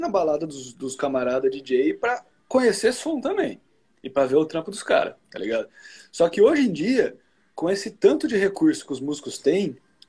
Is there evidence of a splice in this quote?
no; 0 cuts

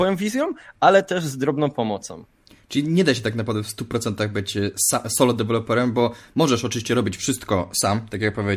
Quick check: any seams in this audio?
no; 0 cuts

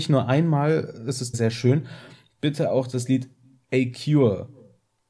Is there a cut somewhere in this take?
yes; 1 cut; at 1.3 s

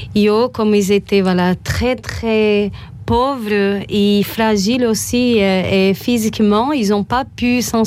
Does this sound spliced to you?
no; 0 cuts

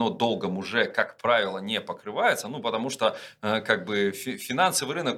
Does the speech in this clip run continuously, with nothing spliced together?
yes; 0 cuts

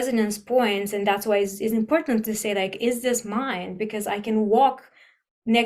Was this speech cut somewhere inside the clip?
no; 0 cuts

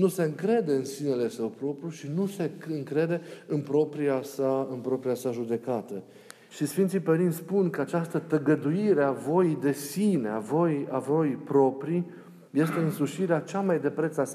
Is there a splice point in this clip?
yes; 1 cut; at 6.5 s

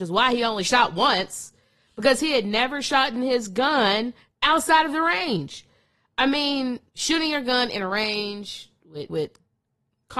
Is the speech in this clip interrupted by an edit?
yes; 2 cuts; at 6.9 s, 9.1 s

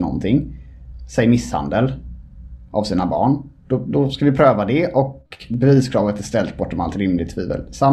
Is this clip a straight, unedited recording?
no; 1 cut; at 3.6 s

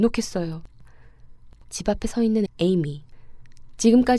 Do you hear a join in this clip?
yes; 1 cut; at 2.5 s

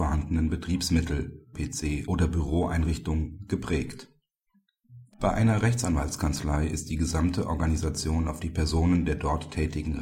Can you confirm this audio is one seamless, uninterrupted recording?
no; 2 cuts; at 1.5 s, 5.1 s

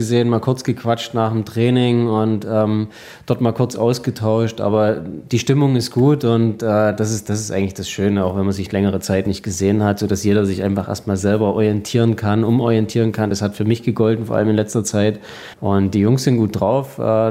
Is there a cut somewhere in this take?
no; 0 cuts

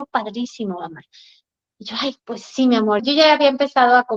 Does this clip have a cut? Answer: yes; 1 cut; at 3.0 s

